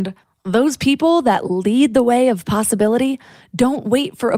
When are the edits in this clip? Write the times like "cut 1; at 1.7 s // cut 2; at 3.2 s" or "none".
none